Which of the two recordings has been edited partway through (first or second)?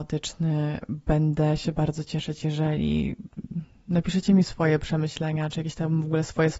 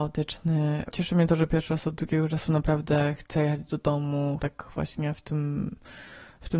second